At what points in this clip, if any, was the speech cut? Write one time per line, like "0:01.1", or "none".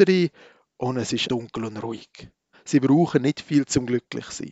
0:01.3
0:02.5